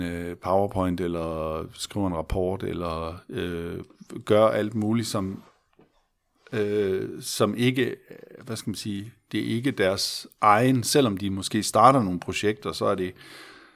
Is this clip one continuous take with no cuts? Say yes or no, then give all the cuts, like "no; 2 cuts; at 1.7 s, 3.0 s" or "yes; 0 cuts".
yes; 0 cuts